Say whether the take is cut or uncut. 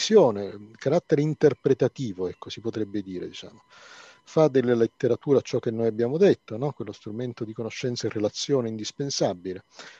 uncut